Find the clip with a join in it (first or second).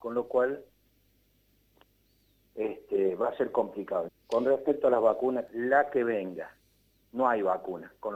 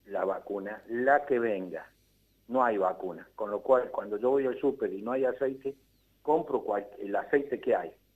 first